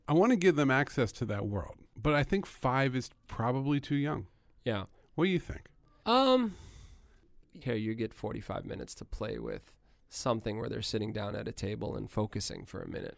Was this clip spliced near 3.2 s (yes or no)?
no